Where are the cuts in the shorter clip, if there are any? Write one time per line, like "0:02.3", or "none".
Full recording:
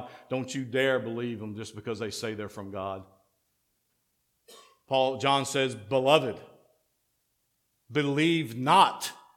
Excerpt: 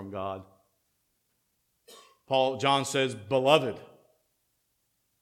none